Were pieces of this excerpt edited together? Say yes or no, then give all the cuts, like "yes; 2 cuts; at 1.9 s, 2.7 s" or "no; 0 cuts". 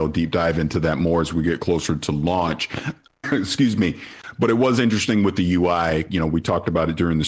no; 0 cuts